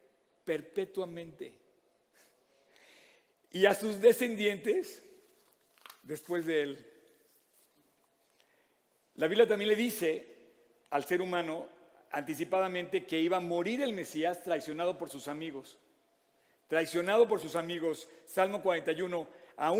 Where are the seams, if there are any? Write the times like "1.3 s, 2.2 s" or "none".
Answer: 9.0 s